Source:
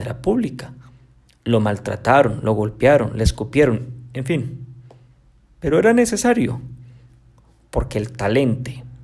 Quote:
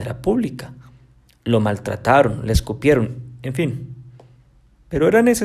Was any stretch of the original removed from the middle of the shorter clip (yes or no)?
yes